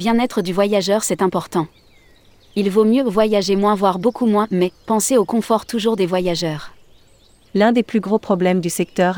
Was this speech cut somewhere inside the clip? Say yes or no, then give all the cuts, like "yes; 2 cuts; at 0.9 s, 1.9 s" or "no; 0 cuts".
yes; 1 cut; at 7.4 s